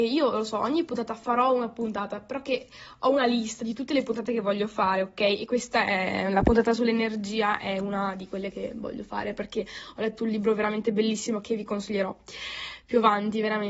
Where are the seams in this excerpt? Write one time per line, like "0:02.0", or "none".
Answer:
none